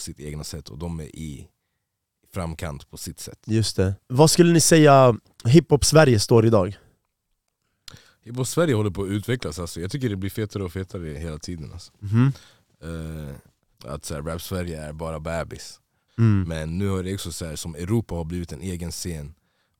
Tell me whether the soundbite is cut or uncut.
cut